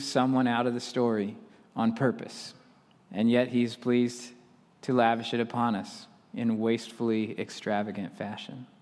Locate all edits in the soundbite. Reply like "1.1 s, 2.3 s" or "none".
3.0 s